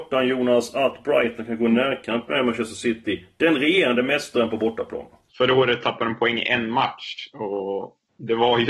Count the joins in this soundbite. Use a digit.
1